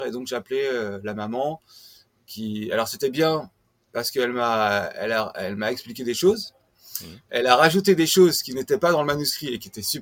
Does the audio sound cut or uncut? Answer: uncut